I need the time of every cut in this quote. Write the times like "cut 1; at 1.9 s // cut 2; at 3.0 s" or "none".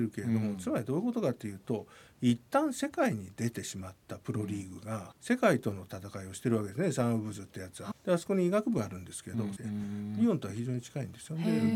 cut 1; at 5.1 s // cut 2; at 7.9 s // cut 3; at 9.6 s